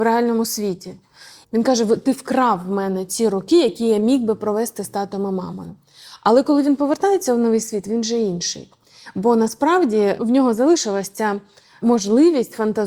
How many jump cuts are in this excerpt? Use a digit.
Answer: 1